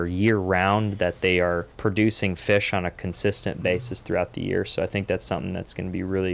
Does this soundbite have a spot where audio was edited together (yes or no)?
yes